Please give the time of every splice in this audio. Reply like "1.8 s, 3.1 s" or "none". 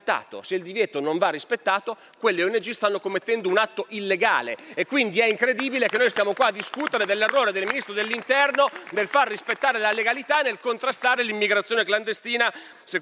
none